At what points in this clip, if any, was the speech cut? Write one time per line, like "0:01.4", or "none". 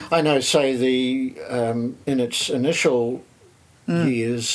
0:02.0